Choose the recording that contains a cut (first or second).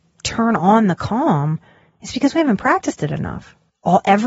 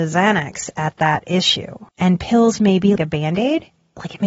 second